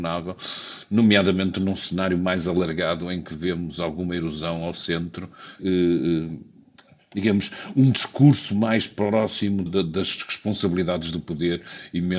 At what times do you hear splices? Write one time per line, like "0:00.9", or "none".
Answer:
0:05.6
0:09.7